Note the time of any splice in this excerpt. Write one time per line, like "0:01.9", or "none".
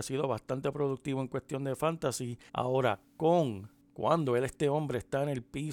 0:02.5